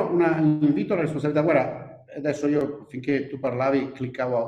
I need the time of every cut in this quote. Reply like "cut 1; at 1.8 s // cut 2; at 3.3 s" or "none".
none